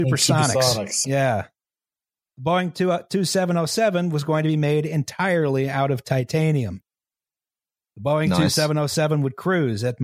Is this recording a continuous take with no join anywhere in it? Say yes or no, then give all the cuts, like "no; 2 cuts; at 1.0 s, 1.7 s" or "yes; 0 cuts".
no; 1 cut; at 1.0 s